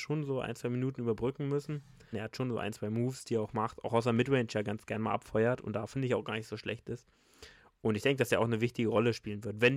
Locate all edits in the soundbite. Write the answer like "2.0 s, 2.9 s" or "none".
2.1 s